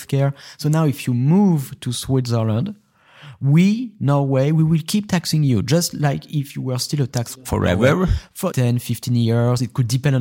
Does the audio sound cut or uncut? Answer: cut